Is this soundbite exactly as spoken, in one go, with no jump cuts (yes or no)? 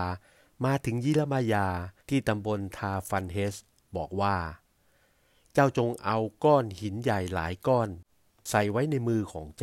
no